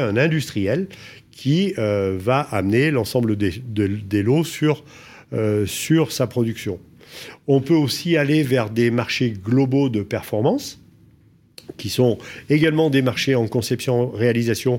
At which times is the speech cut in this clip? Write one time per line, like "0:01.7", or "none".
none